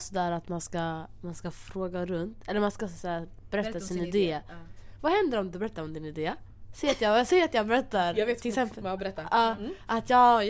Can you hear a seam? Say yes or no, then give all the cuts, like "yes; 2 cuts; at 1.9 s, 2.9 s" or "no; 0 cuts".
no; 0 cuts